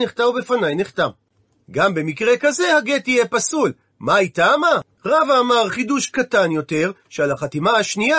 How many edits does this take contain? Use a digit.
2